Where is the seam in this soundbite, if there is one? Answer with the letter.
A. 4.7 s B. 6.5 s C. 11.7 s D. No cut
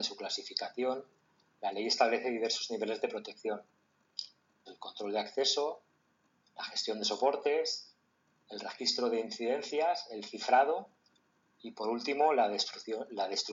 A